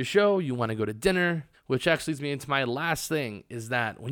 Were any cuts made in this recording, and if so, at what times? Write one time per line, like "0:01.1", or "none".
0:01.5